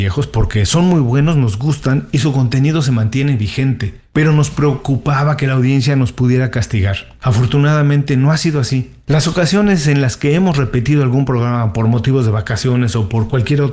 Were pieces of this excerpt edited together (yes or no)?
no